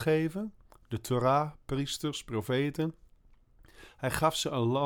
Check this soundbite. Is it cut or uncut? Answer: uncut